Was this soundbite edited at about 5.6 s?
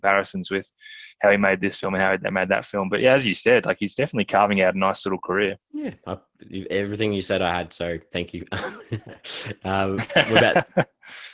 yes; 1 cut; at 5.6 s

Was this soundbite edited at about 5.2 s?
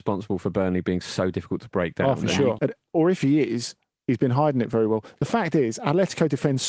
no; 1 cut; at 2.6 s

